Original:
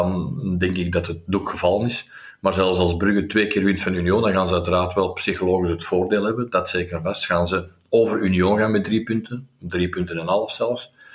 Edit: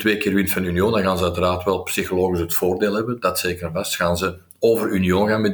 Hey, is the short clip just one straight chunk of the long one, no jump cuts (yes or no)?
yes